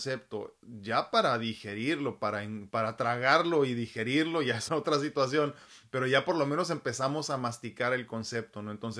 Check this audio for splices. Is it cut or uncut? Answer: cut